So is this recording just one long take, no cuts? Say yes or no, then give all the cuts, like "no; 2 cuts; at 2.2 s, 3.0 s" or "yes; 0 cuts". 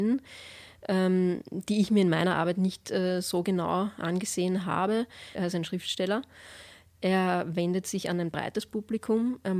no; 1 cut; at 5.3 s